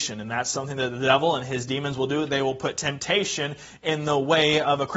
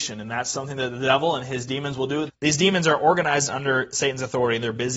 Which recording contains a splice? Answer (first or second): second